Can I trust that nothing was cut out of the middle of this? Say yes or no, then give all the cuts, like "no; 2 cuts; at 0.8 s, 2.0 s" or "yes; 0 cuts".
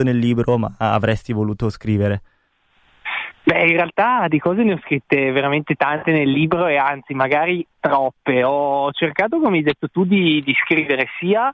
yes; 0 cuts